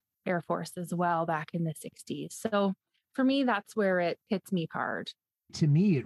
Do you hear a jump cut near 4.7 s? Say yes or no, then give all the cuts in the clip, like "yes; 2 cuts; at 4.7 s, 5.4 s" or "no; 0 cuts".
yes; 1 cut; at 4.7 s